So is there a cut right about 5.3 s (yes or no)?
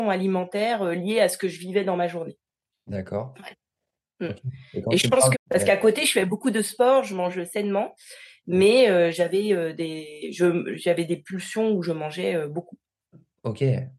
yes